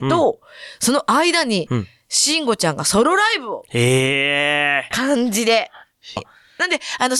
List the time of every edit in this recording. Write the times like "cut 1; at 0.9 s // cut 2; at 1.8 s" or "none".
cut 1; at 4.9 s // cut 2; at 6.2 s